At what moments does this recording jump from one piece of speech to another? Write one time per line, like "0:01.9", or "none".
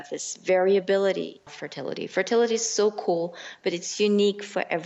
0:01.5

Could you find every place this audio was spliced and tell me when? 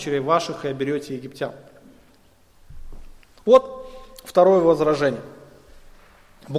none

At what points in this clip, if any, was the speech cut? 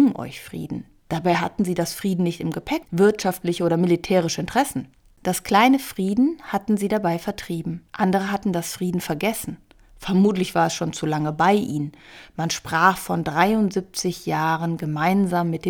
0:02.8
0:07.9

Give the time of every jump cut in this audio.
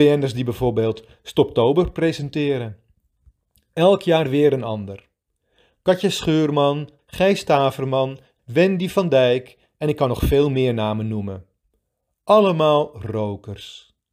0:07.0
0:08.4

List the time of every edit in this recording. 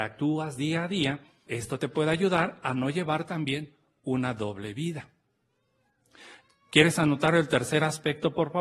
0:01.5

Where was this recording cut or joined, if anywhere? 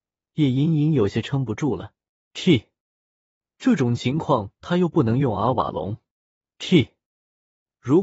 0:02.3

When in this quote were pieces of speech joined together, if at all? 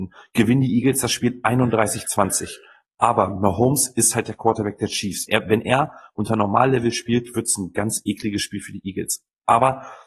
0:05.3

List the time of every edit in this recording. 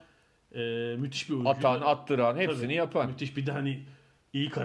none

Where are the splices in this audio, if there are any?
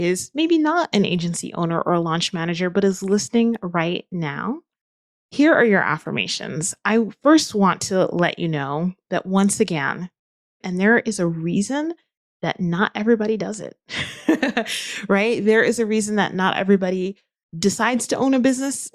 0:10.6

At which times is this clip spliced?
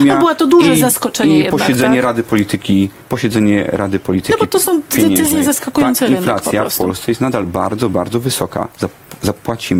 none

